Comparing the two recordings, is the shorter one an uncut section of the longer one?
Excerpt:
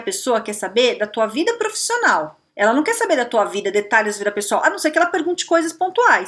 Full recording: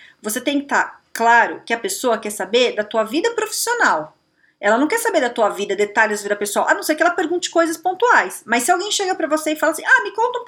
no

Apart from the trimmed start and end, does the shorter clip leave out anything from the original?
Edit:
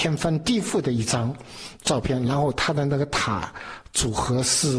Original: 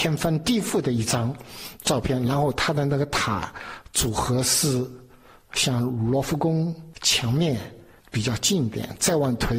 no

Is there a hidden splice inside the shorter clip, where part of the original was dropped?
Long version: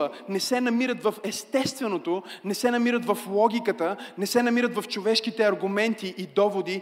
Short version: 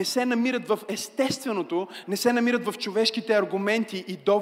yes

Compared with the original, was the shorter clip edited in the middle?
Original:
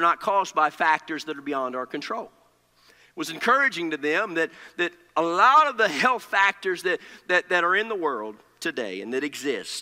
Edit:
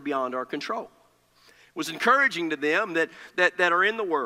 yes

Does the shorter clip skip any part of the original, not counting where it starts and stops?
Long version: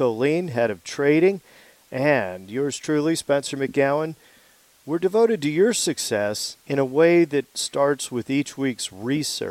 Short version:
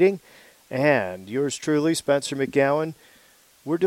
no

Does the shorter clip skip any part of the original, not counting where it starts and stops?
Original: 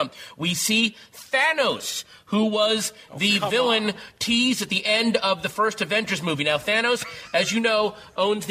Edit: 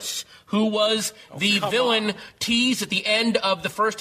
no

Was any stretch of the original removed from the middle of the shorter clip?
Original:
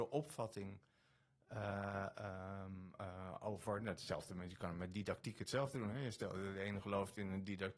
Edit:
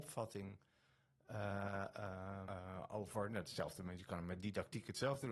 yes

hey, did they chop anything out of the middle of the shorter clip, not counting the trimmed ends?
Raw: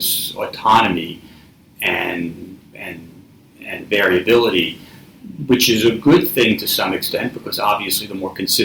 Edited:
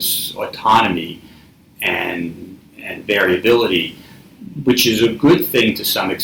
yes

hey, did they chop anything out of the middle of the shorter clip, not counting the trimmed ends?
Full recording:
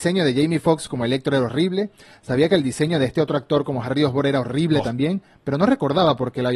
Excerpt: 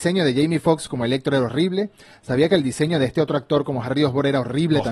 no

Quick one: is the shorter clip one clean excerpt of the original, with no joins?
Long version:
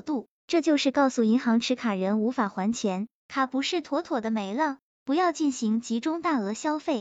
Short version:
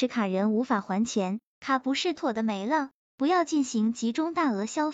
no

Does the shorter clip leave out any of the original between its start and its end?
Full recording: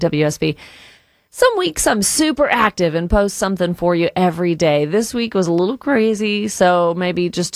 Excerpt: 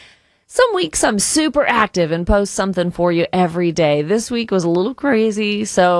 no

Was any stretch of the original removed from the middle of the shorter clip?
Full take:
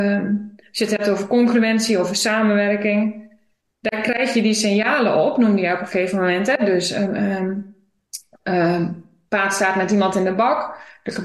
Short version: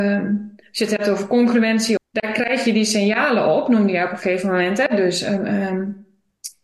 yes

